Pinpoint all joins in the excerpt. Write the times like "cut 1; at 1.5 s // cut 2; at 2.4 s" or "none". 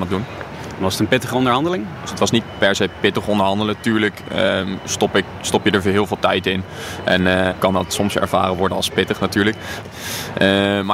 cut 1; at 7.5 s // cut 2; at 9.8 s